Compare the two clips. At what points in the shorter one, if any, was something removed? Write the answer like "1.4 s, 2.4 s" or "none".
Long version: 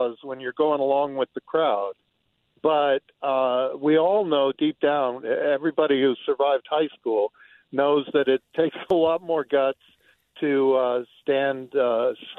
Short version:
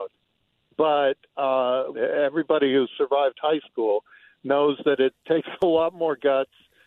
1.9 s

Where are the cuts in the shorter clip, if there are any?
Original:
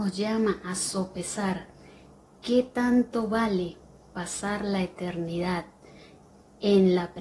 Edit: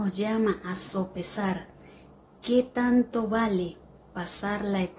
none

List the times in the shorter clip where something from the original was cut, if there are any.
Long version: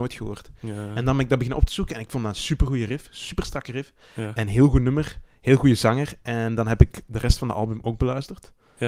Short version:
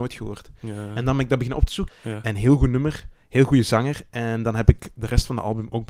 1.9 s

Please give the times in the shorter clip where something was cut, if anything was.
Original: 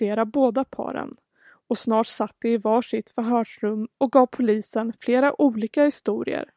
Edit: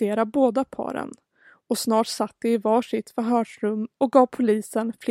none

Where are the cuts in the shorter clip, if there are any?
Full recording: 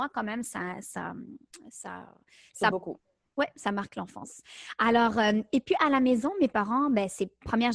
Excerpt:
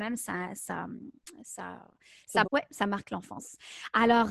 2.4 s

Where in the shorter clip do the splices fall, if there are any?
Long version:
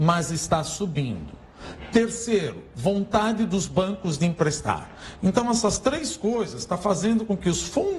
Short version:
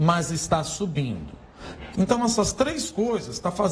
1.9 s

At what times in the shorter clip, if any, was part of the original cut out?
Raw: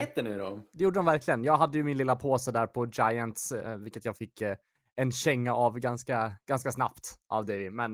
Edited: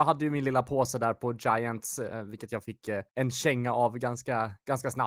3.1 s

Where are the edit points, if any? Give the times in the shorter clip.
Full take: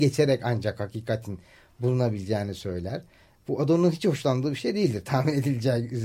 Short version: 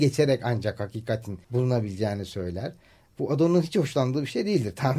1.4 s

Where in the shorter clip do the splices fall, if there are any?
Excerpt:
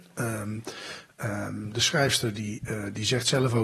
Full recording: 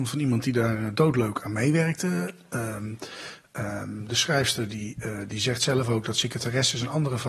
none

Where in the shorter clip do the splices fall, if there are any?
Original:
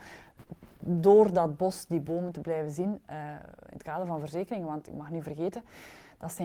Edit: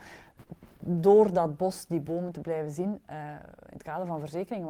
none

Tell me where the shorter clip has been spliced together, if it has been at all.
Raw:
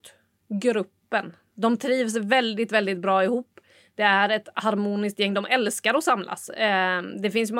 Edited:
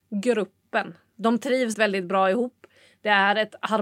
1.7 s

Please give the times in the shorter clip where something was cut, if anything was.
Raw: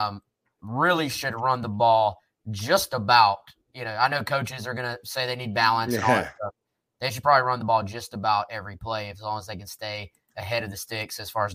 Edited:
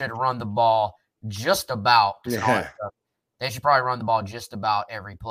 2.3 s

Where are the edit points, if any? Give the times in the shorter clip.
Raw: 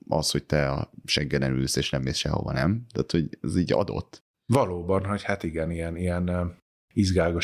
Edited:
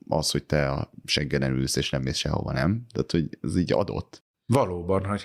none

